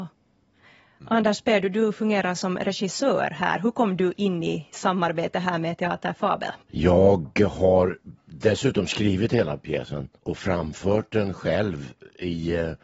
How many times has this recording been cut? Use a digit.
2